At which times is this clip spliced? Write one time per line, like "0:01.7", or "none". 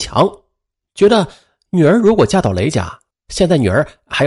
0:03.1

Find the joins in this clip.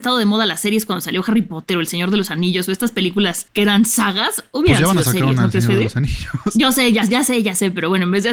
none

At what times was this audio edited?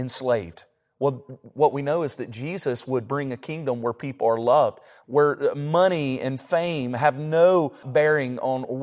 0:05.0
0:07.8

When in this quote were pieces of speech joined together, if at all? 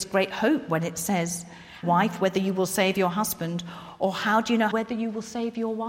0:01.8
0:04.7

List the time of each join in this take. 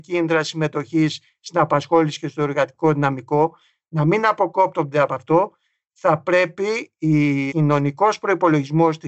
0:07.5

